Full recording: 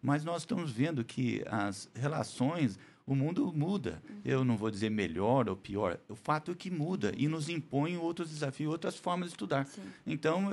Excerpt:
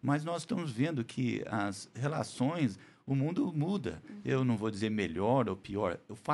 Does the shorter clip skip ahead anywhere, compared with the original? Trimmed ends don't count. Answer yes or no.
no